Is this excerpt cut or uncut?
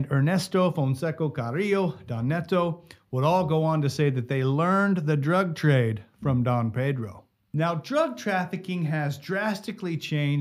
uncut